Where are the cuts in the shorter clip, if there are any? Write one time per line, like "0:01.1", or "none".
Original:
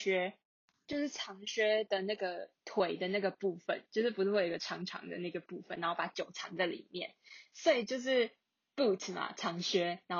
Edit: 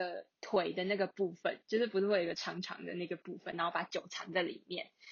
none